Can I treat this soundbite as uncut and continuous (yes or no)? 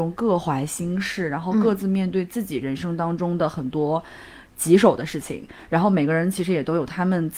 yes